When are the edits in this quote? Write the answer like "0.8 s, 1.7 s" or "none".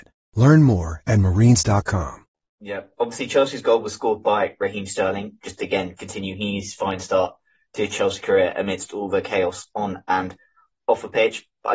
none